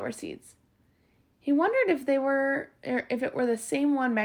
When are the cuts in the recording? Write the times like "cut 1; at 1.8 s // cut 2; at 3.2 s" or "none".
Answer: none